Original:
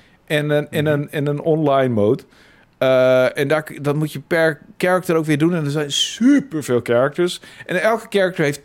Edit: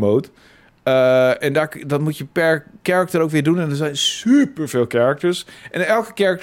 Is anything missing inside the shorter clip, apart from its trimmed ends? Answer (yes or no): no